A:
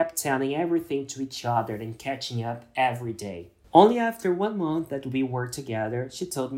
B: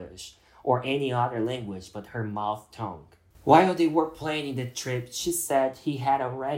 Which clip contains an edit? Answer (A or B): B